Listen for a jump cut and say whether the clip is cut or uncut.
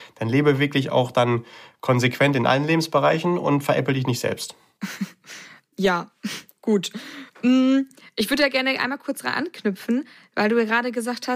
cut